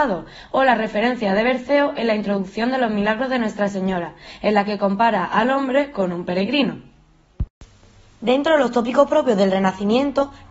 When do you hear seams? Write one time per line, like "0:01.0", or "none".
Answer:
none

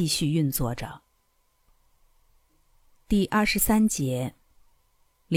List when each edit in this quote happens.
none

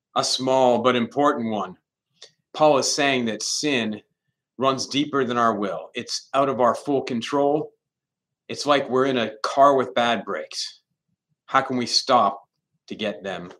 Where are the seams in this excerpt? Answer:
0:02.4

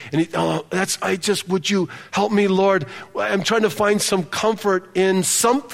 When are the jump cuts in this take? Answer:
none

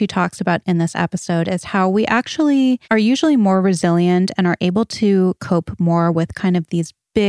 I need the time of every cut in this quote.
0:02.8

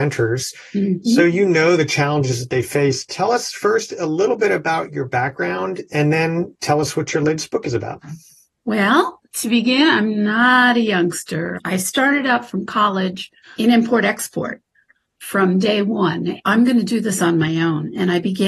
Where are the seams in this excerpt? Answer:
0:11.6
0:16.4

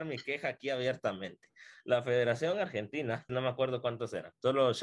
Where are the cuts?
0:03.3

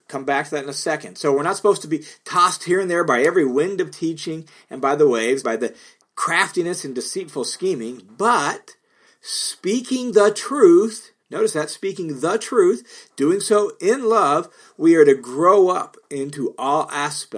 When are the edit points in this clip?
0:05.4

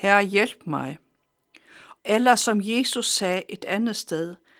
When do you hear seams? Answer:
0:02.0

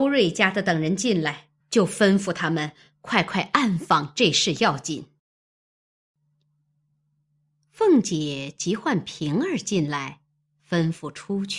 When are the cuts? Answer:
none

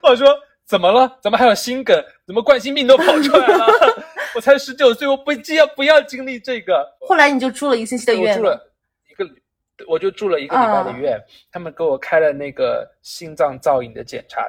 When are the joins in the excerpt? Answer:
none

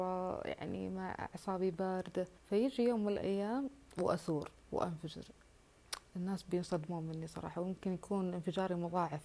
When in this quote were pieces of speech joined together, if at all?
0:02.4

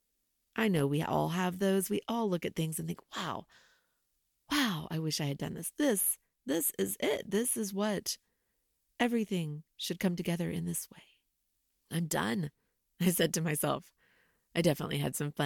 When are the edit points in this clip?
none

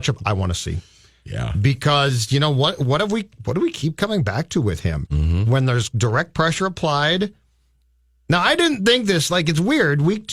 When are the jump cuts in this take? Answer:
0:05.1

